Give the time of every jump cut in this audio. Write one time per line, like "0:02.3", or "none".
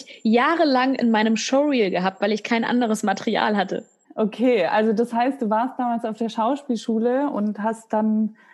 0:04.0